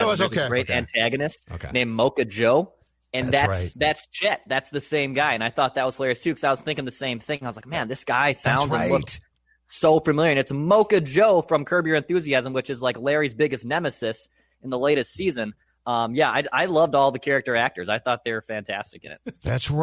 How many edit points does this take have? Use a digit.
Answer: 0